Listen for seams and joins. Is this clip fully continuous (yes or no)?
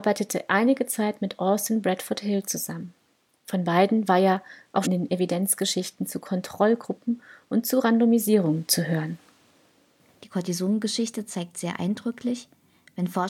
no